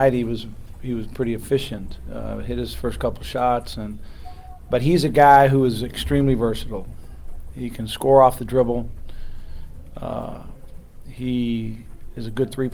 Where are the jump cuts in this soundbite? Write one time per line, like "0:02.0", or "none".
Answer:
none